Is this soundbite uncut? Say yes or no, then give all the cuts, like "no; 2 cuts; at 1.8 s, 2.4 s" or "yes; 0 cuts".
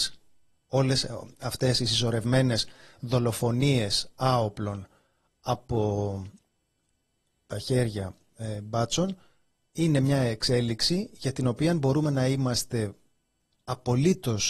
yes; 0 cuts